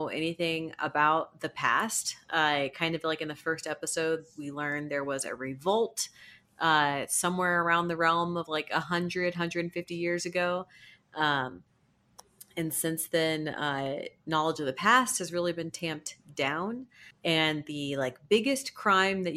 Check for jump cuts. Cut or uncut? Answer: uncut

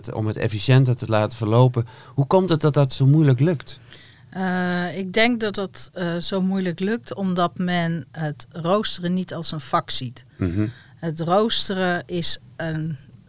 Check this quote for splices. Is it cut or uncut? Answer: uncut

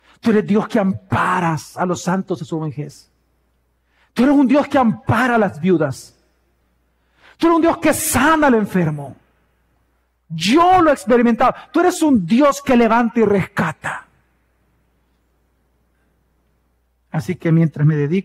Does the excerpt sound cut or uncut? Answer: uncut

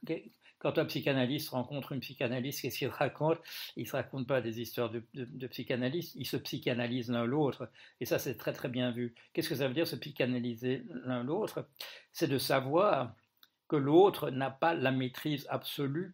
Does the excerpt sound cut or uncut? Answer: uncut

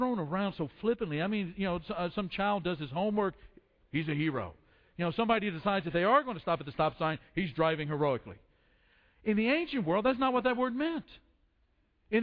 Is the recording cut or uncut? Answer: uncut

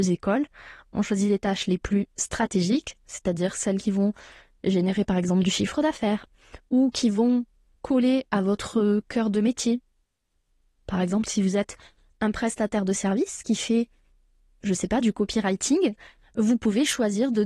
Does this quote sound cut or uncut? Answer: uncut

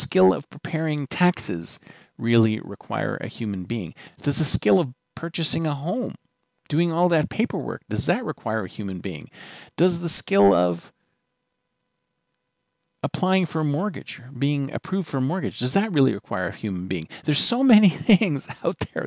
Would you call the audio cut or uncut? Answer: uncut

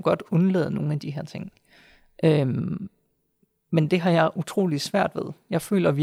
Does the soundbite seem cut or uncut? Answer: uncut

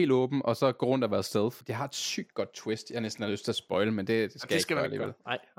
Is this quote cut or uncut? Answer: cut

